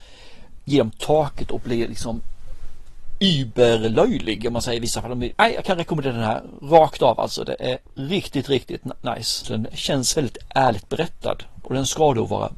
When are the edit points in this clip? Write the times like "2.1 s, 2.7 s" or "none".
5.3 s, 9.4 s

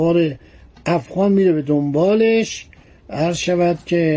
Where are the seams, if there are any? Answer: none

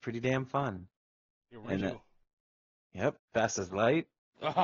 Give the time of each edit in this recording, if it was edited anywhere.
1.8 s, 3.2 s

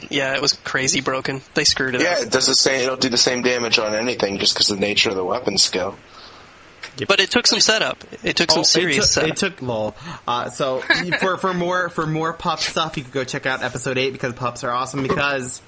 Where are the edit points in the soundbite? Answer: 7.1 s, 9.6 s

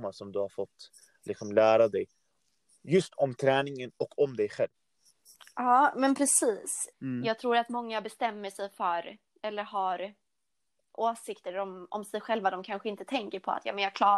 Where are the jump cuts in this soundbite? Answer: 6.9 s

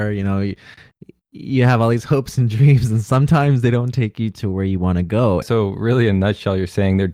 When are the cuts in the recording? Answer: 5.4 s

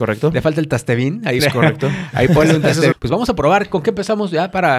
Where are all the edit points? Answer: 1.4 s, 2.9 s

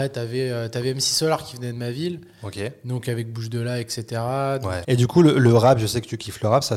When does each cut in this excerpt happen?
4.8 s

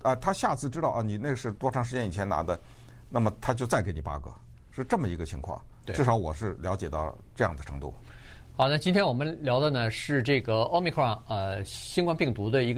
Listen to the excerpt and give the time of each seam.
none

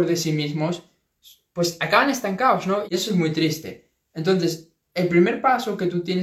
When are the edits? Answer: 2.9 s

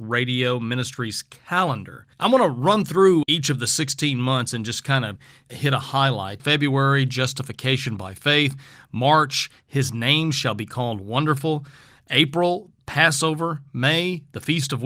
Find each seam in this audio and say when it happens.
2.1 s, 6.4 s

